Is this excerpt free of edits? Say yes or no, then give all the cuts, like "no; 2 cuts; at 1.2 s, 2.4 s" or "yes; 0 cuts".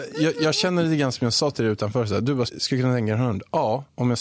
no; 1 cut; at 2.5 s